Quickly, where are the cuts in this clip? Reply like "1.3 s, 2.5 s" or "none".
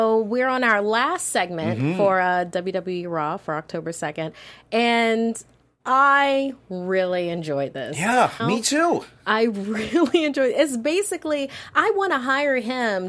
8.4 s